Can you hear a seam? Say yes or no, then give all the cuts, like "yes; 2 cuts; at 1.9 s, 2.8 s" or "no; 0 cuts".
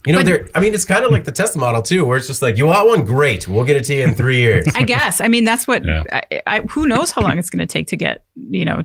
no; 0 cuts